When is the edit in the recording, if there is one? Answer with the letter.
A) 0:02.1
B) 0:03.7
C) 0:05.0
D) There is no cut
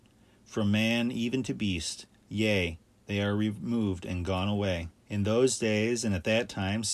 C